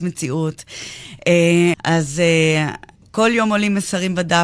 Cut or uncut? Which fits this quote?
cut